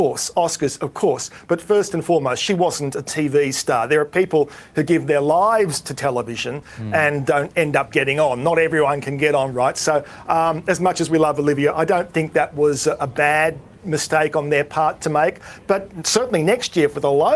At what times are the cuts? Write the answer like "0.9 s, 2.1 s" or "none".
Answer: none